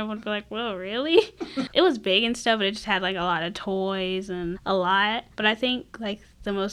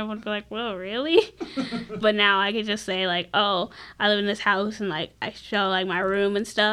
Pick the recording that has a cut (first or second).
first